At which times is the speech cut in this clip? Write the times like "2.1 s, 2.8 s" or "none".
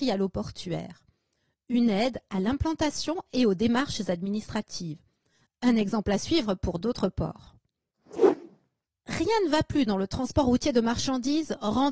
none